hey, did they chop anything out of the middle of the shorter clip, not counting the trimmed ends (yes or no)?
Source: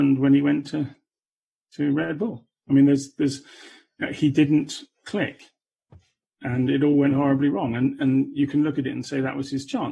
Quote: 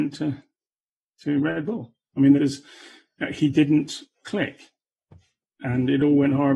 yes